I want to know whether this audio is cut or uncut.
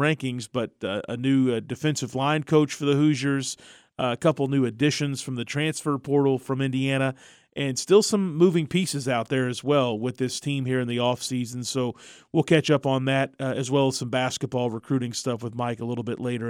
uncut